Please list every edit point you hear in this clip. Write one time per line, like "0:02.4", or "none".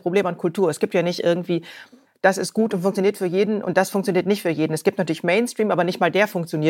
none